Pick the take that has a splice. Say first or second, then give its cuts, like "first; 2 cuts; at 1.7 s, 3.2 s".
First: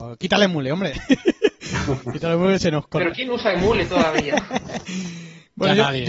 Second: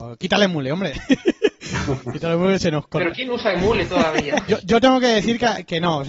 second; 1 cut; at 4.5 s